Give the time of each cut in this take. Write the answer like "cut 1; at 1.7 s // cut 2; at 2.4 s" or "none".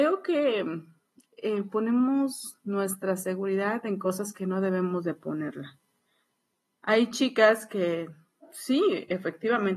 none